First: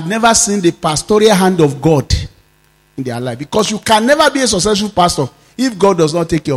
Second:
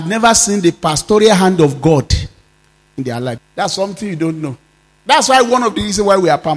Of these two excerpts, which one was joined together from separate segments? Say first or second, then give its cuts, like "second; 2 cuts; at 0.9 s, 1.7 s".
second; 1 cut; at 3.4 s